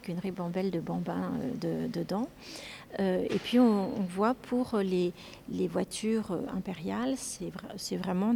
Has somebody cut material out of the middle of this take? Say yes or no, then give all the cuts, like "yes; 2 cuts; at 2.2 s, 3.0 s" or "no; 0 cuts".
no; 0 cuts